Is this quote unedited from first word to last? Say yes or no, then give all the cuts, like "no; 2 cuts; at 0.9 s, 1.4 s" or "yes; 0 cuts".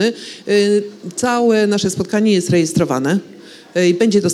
yes; 0 cuts